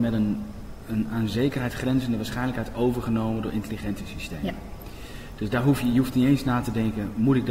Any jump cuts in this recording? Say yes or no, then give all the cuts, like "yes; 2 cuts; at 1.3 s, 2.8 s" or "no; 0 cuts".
yes; 1 cut; at 5.5 s